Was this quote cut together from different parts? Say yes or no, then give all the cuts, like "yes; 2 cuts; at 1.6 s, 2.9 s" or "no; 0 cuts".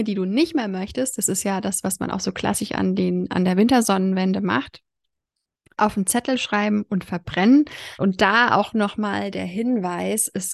yes; 1 cut; at 8.0 s